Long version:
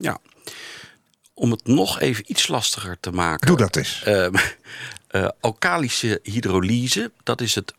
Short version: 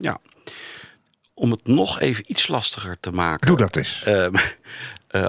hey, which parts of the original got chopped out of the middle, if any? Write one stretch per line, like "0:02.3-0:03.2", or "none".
none